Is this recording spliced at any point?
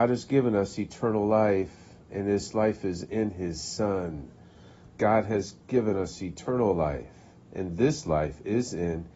yes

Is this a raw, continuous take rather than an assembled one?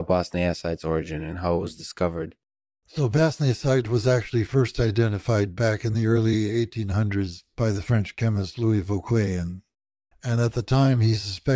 yes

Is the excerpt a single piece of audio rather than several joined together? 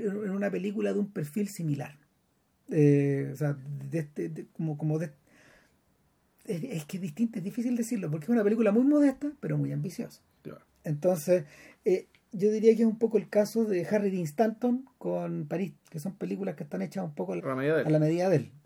no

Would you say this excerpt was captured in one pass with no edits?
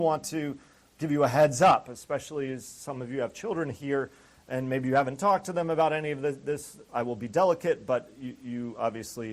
no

